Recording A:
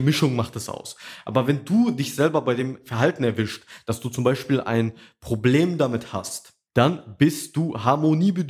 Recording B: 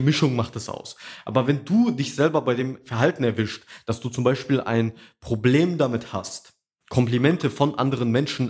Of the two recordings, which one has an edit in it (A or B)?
A